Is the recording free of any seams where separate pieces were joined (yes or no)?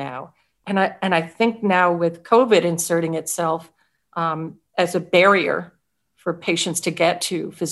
yes